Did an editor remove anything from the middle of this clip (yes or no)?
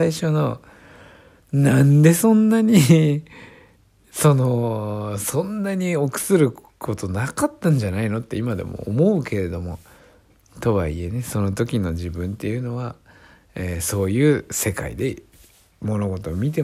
no